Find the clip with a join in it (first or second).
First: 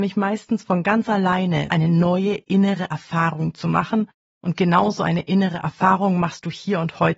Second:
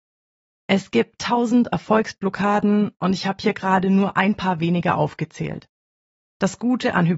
first